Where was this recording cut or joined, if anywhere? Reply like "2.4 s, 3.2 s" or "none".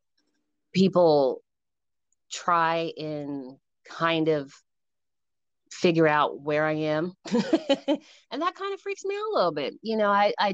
none